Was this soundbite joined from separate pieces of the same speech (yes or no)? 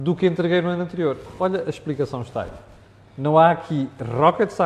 no